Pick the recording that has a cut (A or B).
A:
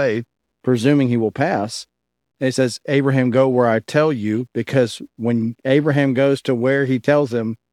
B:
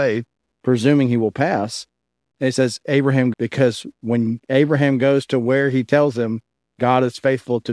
B